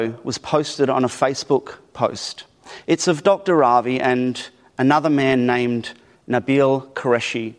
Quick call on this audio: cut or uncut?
uncut